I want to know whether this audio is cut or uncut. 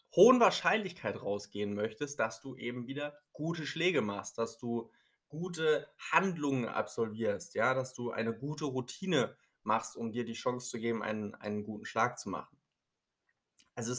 uncut